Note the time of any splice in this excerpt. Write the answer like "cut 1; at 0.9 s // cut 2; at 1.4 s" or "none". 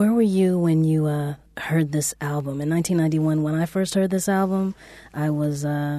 none